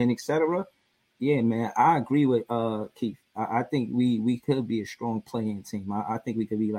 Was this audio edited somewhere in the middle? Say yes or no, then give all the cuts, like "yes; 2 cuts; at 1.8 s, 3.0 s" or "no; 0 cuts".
no; 0 cuts